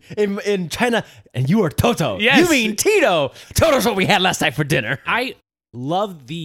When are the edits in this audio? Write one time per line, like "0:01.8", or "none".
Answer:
0:01.3
0:05.0